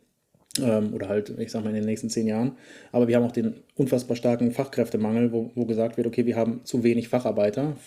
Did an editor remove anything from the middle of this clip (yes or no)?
no